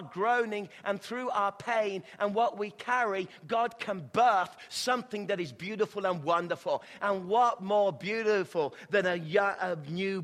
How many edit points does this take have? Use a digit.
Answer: 0